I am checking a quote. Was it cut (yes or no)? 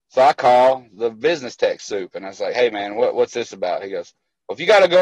no